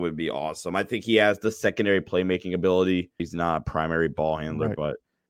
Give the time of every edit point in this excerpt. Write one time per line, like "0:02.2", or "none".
0:03.2